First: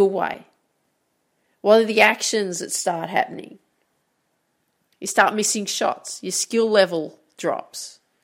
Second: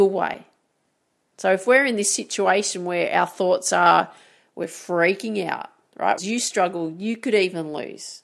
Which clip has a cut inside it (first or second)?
second